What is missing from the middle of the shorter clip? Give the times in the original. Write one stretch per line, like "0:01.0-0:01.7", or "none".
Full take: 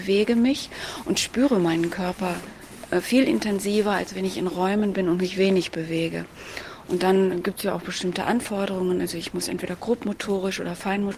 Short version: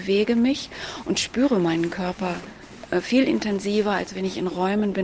none

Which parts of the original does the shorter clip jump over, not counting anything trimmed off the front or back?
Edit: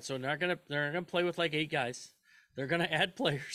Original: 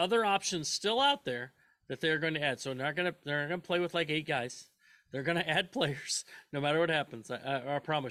none

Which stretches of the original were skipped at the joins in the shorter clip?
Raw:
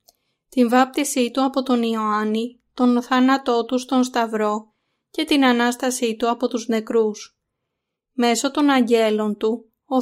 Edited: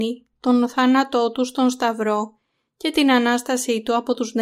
none

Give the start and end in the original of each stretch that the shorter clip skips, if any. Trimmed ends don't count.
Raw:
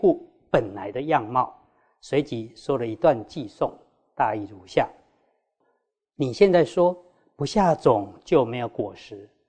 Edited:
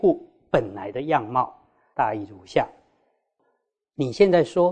0:01.9-0:04.1

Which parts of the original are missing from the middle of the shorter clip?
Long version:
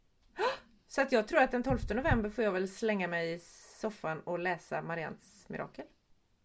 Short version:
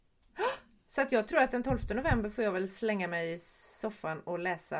none

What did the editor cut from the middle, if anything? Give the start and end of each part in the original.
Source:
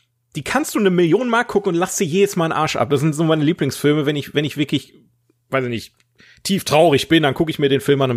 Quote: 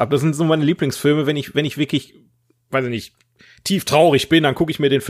none

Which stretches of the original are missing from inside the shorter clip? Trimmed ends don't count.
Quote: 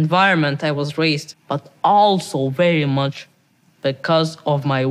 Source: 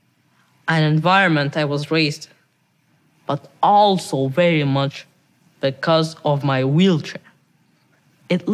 0:02.3-0:03.1

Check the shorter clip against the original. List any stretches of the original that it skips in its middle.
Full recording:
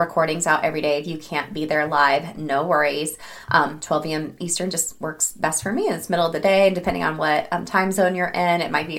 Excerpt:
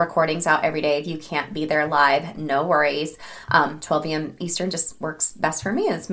none

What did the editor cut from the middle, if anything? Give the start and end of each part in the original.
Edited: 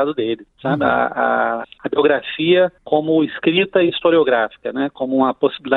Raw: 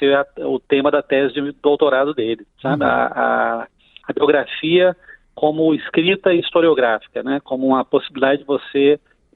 0:03.6-0:03.9
0:05.0-0:05.3

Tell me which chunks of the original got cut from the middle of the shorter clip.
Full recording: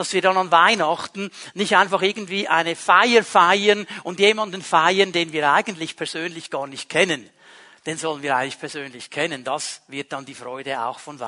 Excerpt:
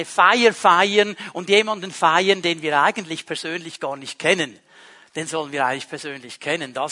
none

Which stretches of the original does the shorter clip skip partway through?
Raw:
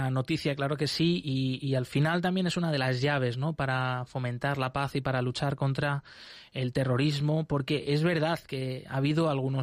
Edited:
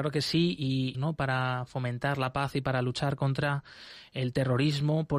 0:01.6-0:03.3

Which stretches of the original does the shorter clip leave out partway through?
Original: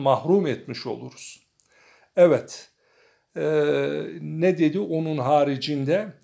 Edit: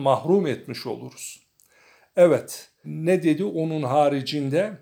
0:02.8-0:04.2

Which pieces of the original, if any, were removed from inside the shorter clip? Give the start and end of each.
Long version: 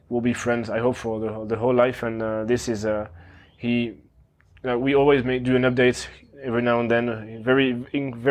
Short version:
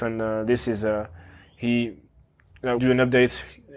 0:04.8-0:05.4

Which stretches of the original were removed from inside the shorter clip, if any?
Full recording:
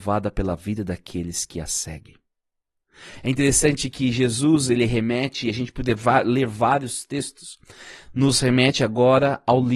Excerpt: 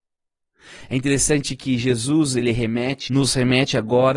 0:05.4-0:08.1

